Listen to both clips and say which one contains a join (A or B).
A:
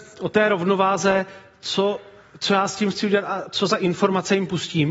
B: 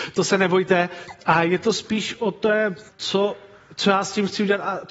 B